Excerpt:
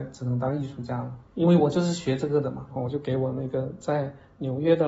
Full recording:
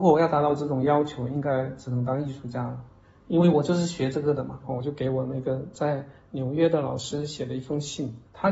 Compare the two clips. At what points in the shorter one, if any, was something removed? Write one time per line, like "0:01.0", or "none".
0:01.3